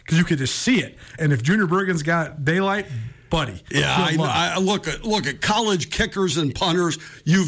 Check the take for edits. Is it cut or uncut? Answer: cut